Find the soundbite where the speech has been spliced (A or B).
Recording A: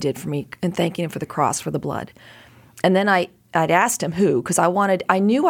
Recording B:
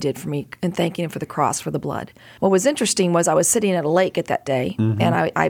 B